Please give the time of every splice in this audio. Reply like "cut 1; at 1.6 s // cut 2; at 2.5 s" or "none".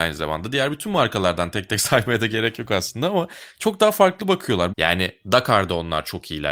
cut 1; at 4.7 s